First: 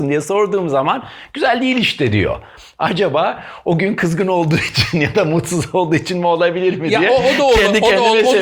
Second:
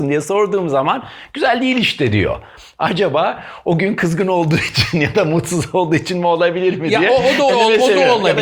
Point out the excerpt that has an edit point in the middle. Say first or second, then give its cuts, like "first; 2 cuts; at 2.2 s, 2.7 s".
second; 1 cut; at 7.5 s